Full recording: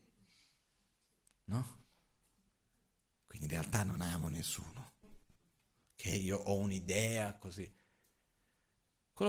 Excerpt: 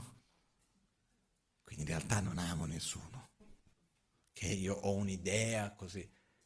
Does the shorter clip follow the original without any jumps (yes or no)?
yes